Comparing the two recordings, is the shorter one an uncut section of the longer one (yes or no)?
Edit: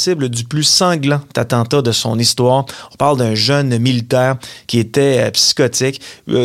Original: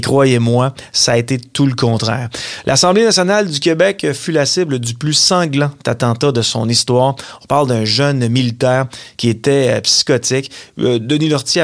yes